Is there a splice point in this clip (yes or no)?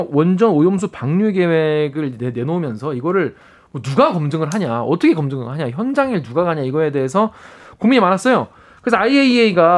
no